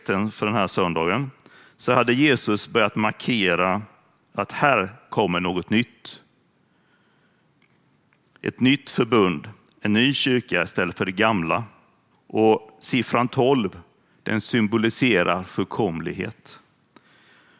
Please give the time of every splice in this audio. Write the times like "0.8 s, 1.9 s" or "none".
12.1 s